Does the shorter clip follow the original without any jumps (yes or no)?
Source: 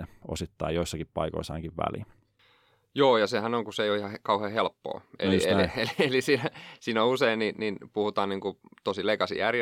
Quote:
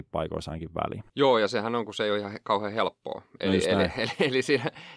no